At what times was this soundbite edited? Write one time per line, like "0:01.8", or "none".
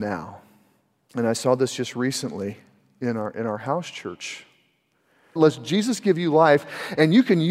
0:01.1
0:05.4